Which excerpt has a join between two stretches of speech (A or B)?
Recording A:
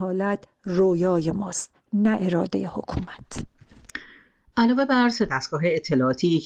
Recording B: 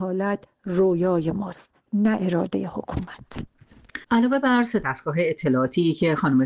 B